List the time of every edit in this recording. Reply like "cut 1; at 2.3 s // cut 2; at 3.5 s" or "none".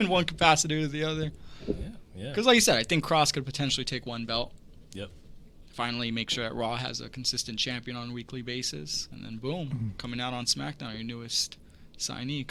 none